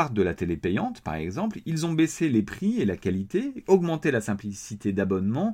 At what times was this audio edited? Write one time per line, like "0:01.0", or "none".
0:03.6